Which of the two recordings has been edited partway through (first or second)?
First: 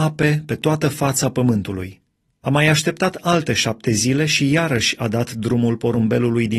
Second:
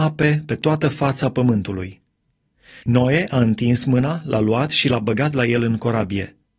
first